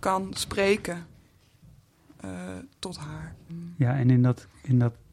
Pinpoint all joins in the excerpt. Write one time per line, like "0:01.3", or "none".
0:03.5